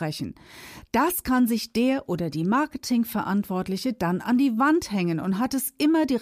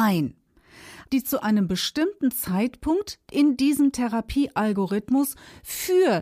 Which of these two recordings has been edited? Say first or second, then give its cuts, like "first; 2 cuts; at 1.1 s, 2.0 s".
second; 1 cut; at 1.1 s